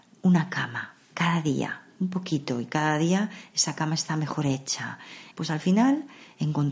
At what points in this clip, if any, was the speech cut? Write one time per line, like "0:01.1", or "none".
0:05.3